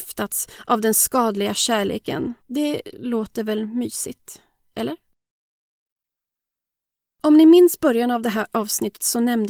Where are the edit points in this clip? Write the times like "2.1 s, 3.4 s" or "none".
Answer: 2.4 s